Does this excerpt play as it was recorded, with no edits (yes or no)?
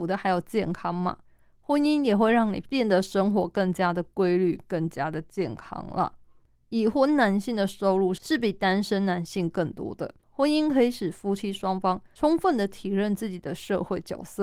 no